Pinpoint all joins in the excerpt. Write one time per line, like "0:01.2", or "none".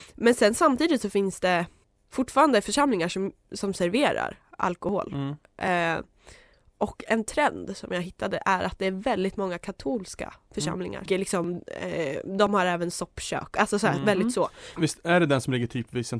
0:11.1
0:14.8